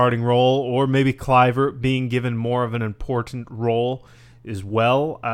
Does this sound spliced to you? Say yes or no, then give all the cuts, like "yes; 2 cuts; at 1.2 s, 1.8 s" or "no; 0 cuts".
no; 0 cuts